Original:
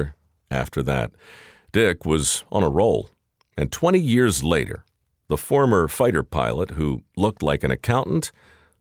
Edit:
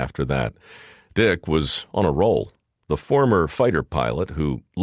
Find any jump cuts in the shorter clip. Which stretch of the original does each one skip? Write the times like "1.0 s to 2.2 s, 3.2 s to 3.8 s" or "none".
3.4 s to 5.2 s